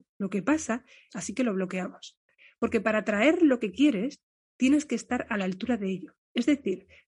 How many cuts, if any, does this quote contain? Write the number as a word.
one